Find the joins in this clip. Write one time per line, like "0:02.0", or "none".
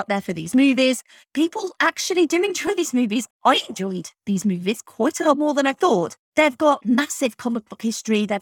0:06.2